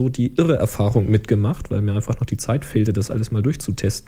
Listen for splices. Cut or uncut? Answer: uncut